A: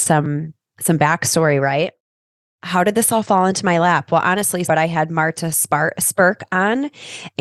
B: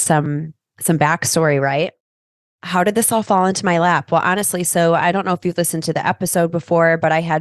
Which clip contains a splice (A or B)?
A